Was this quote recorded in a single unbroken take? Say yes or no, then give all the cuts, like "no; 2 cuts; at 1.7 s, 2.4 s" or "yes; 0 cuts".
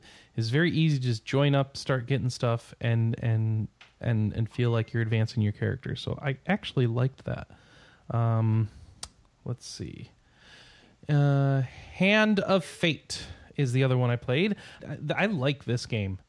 no; 1 cut; at 14.8 s